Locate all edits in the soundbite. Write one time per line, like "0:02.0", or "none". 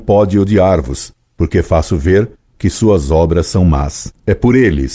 0:01.3

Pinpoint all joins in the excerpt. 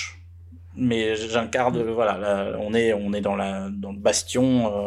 none

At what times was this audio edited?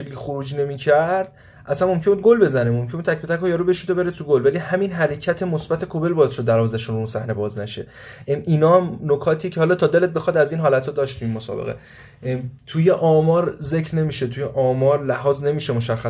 none

